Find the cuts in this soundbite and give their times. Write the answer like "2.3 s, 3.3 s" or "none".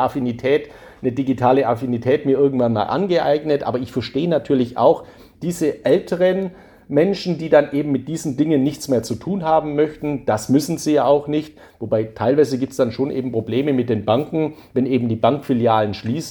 none